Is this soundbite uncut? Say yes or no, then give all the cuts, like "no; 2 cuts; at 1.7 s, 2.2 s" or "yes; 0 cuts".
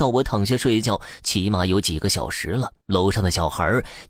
no; 1 cut; at 2.8 s